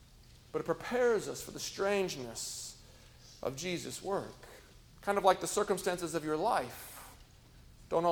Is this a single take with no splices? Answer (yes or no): no